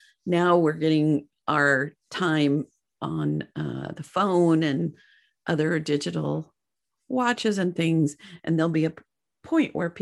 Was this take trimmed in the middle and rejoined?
no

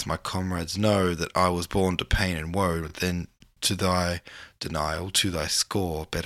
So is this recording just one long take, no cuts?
yes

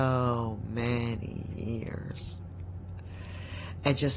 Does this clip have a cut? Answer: no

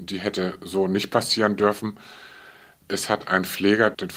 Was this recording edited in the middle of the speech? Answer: no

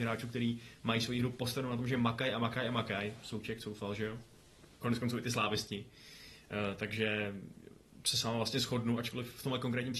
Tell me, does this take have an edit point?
yes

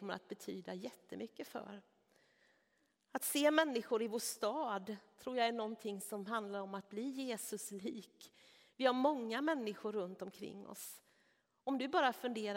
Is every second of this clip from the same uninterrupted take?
yes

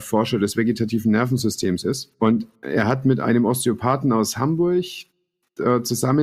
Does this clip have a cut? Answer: yes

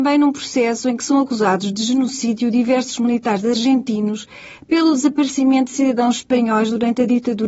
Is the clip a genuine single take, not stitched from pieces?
yes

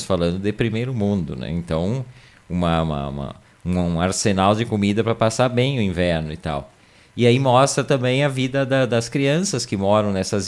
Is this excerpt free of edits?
yes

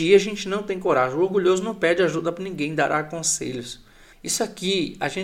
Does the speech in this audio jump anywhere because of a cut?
yes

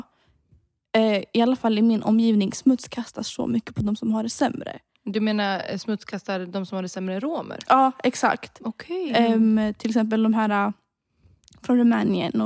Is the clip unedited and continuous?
yes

